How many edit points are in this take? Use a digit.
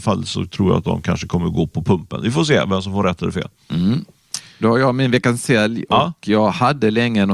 0